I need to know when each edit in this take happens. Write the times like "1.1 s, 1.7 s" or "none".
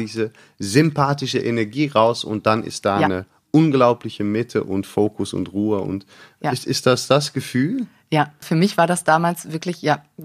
8.4 s